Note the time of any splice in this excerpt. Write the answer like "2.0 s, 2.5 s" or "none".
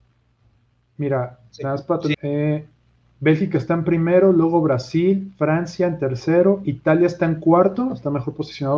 2.1 s